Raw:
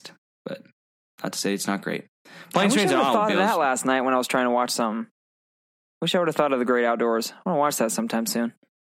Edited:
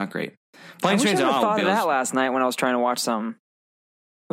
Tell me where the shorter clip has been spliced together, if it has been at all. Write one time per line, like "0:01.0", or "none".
none

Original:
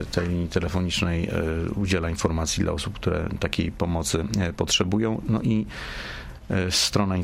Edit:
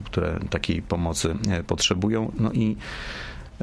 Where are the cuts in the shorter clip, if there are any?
none

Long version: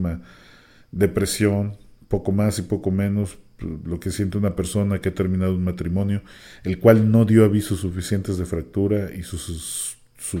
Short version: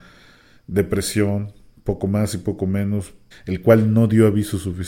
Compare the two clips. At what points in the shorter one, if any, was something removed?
0:03.3

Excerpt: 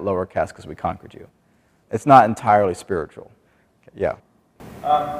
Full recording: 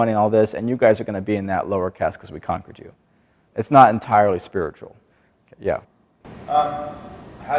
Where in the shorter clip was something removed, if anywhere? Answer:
none

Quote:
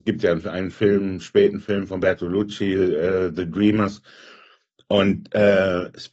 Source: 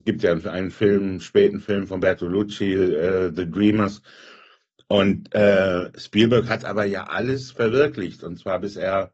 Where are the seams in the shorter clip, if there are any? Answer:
none

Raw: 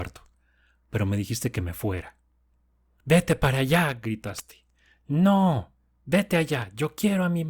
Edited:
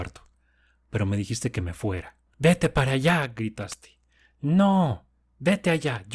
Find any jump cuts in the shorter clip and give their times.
0:02.3

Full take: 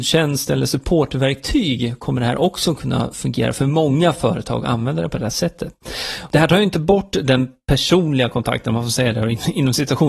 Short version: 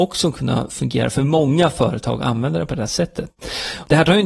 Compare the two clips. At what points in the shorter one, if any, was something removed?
none

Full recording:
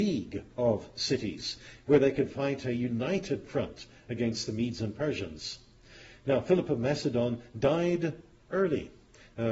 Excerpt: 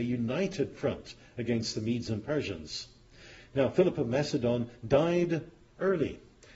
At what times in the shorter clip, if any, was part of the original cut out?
none

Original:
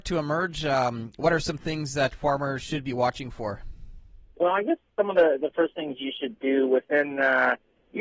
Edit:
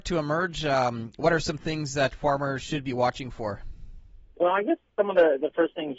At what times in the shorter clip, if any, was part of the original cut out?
none

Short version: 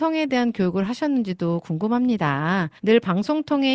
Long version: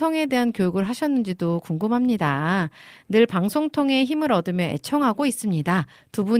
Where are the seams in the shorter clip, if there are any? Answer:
0:02.8

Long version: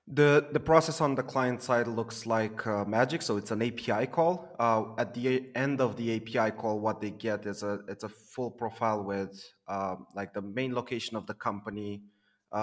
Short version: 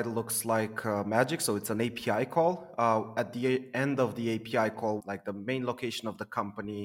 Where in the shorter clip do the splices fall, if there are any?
0:05.0

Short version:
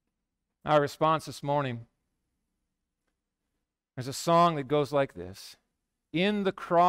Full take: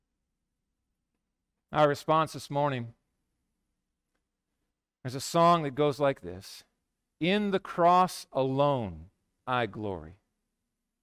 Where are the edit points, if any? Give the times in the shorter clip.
none

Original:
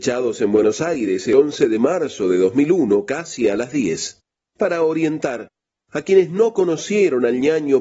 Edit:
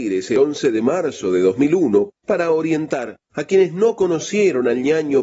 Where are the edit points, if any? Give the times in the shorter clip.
0:02.1
0:03.2

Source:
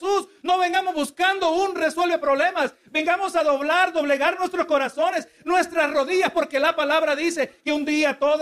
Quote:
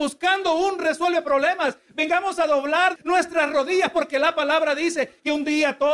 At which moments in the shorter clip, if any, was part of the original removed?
0:03.0

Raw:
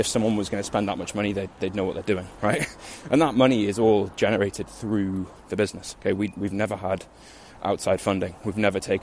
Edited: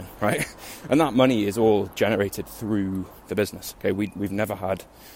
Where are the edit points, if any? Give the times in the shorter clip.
none

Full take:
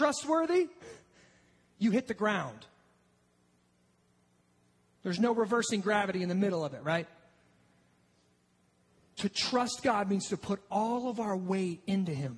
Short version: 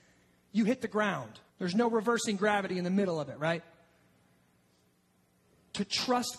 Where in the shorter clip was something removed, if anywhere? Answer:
0:01.5

